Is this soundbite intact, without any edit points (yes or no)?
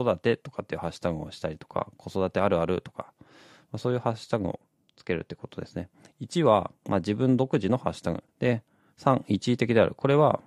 no